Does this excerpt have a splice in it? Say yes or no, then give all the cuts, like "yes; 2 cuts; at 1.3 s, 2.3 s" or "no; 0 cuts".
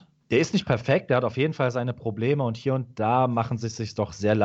no; 0 cuts